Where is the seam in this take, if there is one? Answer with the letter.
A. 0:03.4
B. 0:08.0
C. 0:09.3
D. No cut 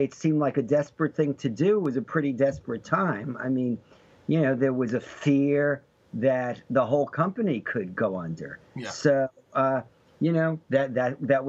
D